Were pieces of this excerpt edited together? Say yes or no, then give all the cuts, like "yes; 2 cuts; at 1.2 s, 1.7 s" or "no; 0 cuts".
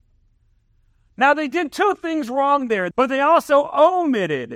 yes; 1 cut; at 2.9 s